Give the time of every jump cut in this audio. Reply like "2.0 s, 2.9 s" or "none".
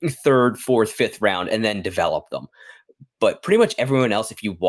none